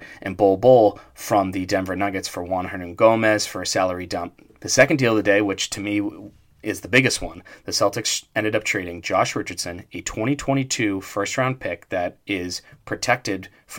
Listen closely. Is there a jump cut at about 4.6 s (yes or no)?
yes